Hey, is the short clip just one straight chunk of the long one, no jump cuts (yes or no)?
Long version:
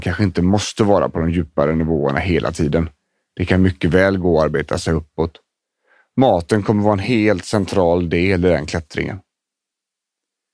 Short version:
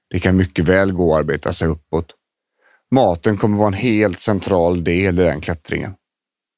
yes